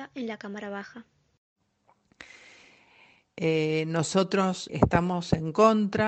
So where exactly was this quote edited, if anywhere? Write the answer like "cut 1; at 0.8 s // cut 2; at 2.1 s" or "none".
cut 1; at 4.7 s